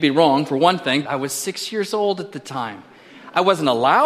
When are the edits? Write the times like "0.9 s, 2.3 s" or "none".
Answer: 1.0 s